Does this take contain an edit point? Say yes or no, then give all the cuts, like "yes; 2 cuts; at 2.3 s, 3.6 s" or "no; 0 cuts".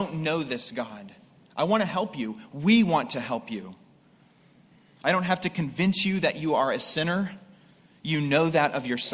no; 0 cuts